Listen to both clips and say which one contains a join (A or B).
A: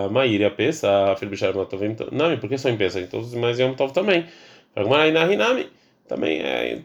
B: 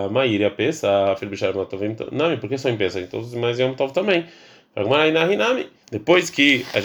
B